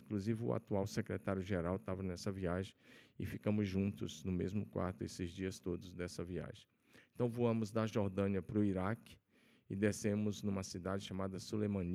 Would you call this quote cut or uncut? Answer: uncut